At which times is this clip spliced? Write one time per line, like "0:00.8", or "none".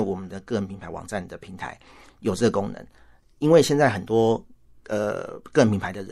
none